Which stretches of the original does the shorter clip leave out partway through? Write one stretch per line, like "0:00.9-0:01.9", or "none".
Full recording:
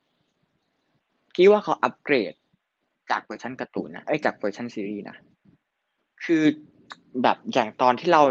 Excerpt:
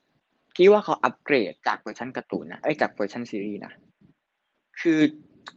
0:02.4-0:03.0